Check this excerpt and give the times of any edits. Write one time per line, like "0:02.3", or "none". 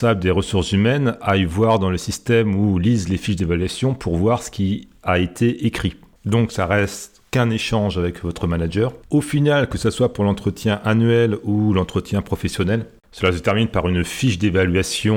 0:06.2
0:09.0

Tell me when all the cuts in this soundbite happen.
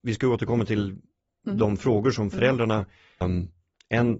0:03.2

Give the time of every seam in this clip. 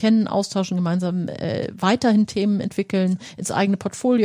none

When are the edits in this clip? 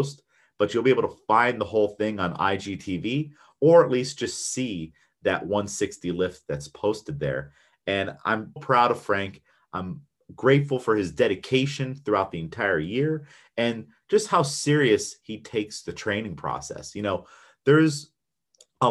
0:08.6

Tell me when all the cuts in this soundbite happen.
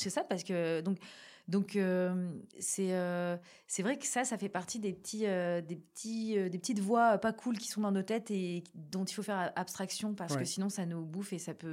0:02.5

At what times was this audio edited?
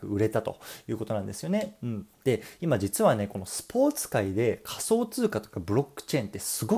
0:02.1

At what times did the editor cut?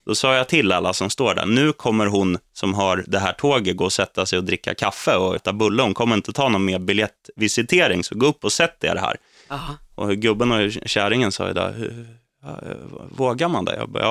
0:05.4

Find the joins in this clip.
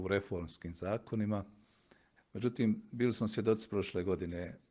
0:02.2

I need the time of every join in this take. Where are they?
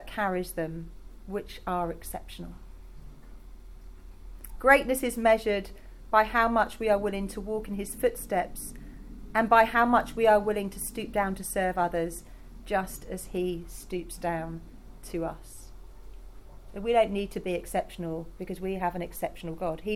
none

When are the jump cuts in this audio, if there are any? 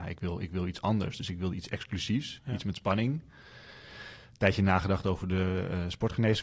none

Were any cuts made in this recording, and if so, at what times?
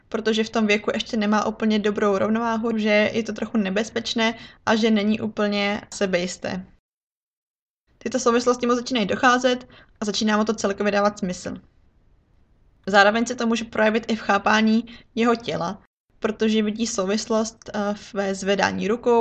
0:02.7
0:07.9

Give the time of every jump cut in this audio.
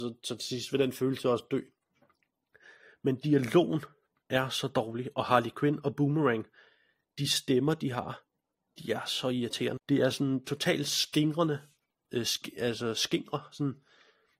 0:09.8
0:12.0

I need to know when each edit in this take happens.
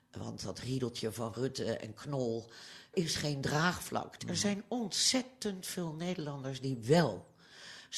0:02.9
0:04.2

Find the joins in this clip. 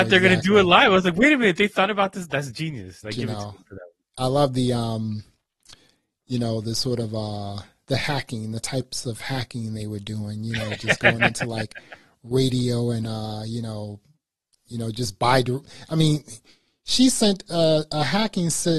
0:03.0

